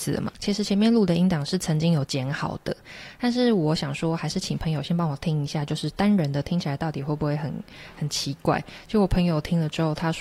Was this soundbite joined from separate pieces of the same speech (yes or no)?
no